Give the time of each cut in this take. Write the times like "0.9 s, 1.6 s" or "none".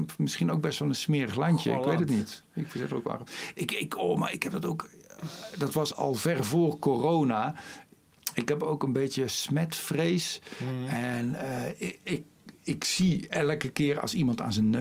5.9 s